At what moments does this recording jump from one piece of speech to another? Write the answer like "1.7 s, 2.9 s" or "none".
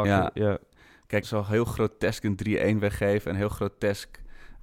1.2 s